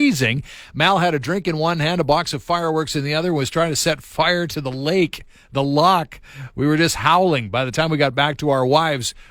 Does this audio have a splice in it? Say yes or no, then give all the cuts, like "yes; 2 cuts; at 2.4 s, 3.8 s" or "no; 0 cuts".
no; 0 cuts